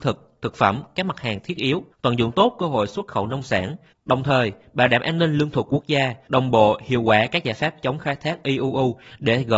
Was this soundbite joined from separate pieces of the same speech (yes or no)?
yes